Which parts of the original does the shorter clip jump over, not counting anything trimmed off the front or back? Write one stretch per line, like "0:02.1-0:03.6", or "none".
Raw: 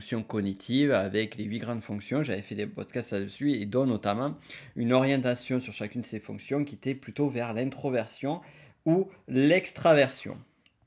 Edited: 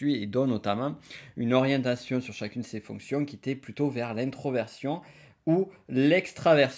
none

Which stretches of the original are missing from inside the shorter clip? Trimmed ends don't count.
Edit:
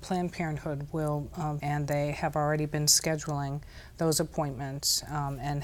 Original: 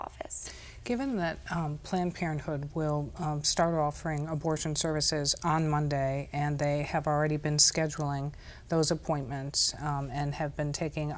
0:03.4-0:06.3

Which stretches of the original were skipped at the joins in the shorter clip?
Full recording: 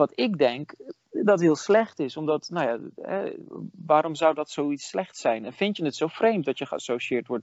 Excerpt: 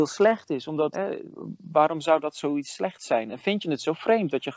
0:02.4-0:03.1

